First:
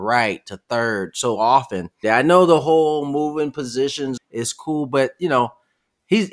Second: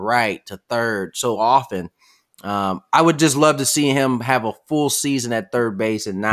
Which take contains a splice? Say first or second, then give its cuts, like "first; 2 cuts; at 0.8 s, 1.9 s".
first; 2 cuts; at 2.0 s, 4.2 s